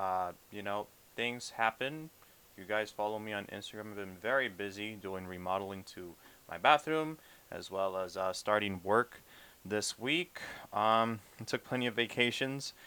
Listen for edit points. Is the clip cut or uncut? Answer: uncut